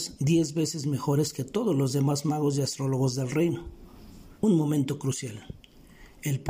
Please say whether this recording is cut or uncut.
cut